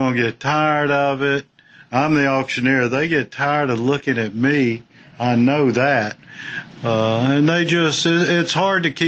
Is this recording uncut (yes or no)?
yes